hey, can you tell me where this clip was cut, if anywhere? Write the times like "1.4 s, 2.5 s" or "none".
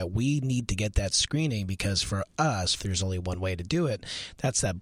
2.8 s